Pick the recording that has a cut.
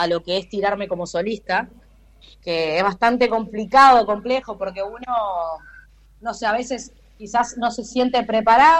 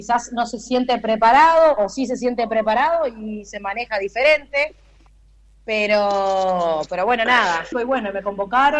second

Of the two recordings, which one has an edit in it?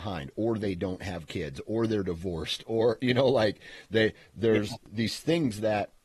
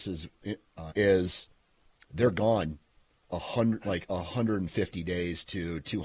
second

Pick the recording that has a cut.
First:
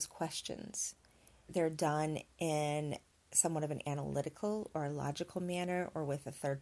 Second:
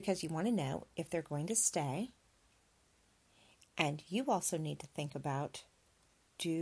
first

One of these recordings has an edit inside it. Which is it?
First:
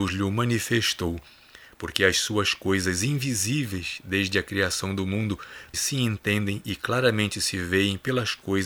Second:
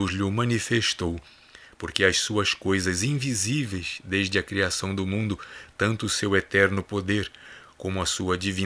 first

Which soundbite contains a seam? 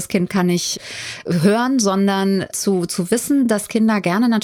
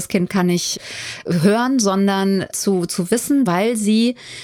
second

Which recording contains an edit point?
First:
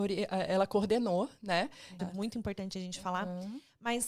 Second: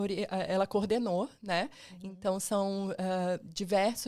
first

